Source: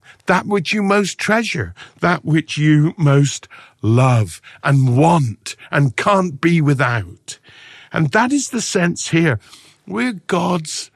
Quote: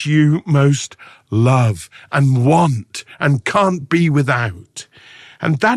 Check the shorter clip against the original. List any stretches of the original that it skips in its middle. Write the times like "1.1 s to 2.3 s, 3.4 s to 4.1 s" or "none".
none